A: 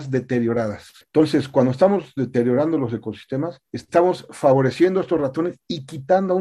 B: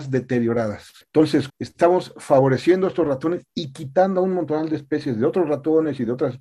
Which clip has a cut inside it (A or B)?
B